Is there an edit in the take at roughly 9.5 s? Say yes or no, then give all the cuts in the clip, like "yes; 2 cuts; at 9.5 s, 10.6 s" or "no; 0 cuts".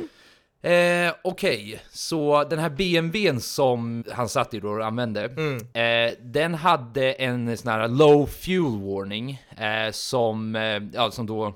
no; 1 cut; at 4.0 s